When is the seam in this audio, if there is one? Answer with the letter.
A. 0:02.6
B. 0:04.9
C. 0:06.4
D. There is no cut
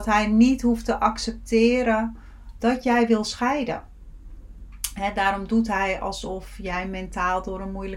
A